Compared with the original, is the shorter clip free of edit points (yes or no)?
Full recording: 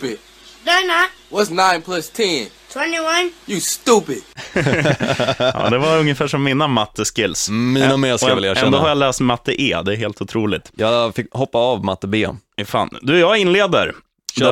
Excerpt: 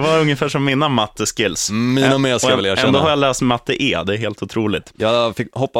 yes